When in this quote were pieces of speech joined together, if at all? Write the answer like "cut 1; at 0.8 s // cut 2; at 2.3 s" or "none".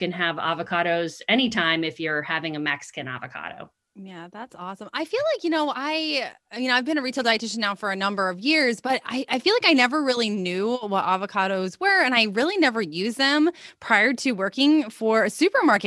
none